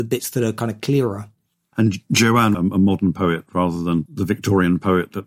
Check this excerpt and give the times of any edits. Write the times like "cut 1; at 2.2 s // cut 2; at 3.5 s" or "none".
cut 1; at 2.5 s